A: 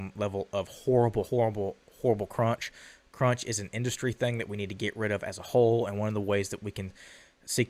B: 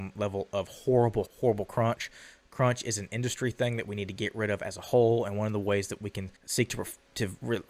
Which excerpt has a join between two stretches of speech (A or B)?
B